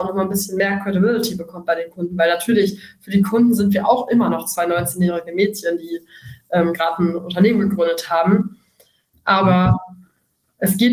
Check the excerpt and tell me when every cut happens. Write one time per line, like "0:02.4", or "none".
0:09.1